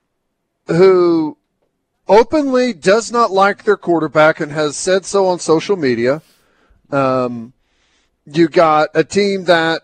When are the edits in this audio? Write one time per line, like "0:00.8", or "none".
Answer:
none